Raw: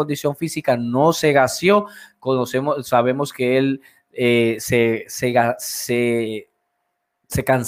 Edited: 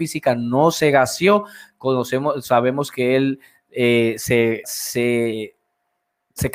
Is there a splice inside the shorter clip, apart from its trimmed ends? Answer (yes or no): yes